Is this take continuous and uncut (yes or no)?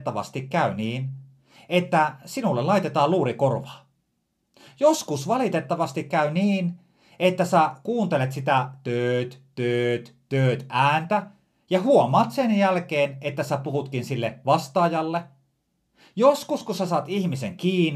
yes